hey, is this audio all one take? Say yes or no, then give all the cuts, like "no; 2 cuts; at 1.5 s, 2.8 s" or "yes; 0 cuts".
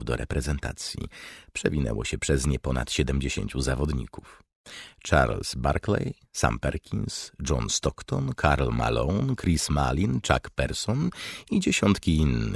yes; 0 cuts